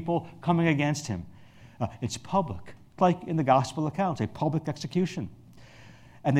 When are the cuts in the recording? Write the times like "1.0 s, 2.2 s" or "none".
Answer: 3.0 s